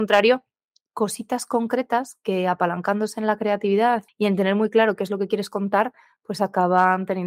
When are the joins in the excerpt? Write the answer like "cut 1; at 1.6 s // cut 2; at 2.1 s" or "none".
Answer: cut 1; at 4.1 s